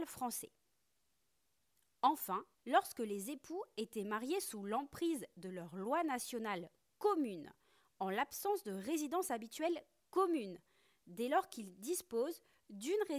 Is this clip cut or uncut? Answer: cut